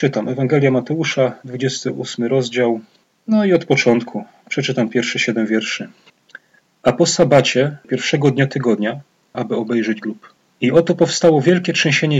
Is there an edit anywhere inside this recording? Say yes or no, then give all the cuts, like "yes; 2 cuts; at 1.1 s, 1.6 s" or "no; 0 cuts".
yes; 2 cuts; at 7.8 s, 9.3 s